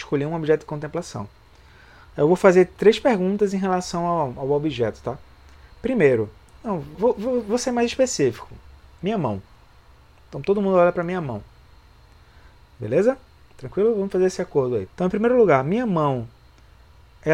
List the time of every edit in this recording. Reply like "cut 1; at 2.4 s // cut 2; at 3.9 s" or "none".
cut 1; at 6.9 s // cut 2; at 14.9 s